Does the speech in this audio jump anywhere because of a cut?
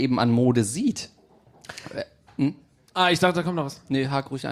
no; 0 cuts

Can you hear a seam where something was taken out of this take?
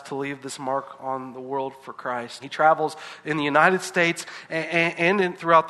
yes; 1 cut; at 2.4 s

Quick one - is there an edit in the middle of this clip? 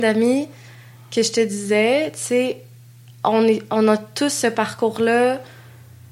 no; 0 cuts

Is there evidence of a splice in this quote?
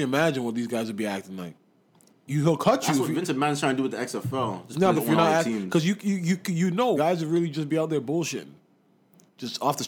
yes; 2 cuts; at 5.0 s, 7.0 s

